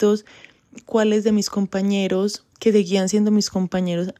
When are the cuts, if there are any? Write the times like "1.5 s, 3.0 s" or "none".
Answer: 2.5 s